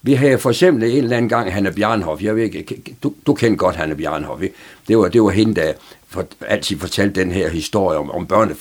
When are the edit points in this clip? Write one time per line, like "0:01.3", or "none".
none